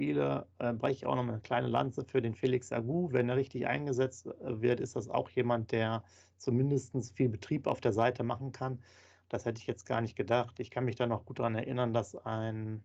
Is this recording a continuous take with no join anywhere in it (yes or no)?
yes